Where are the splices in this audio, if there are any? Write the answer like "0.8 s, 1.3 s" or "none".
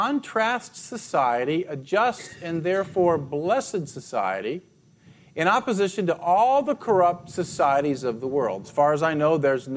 8.6 s